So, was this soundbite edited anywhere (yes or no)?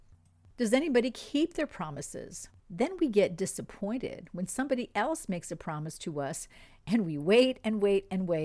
yes